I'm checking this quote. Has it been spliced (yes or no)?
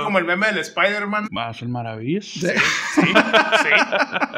yes